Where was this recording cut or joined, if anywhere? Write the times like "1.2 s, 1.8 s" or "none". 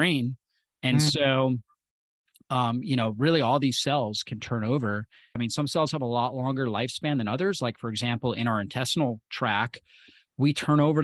5.4 s

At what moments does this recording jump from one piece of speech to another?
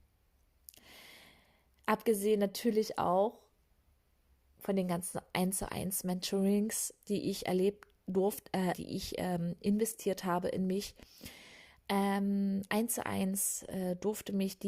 8.7 s

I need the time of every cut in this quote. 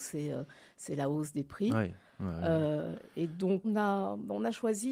3.6 s

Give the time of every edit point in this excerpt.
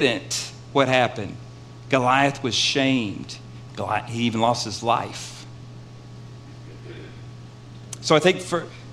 3.7 s

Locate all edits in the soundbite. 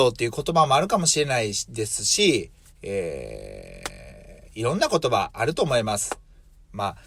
none

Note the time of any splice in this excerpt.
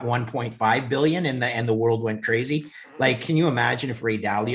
none

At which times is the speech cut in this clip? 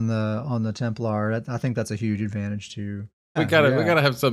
3.4 s

